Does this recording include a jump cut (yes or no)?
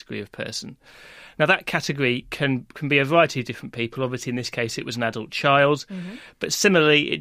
no